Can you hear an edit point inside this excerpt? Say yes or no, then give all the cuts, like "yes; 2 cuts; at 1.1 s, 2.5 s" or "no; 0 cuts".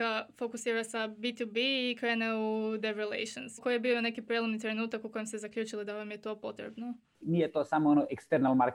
yes; 2 cuts; at 3.6 s, 7.2 s